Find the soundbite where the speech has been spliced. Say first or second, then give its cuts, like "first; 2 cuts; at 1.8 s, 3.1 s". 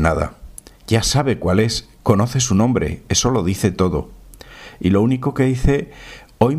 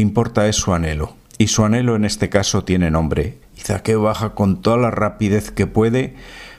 second; 1 cut; at 3.4 s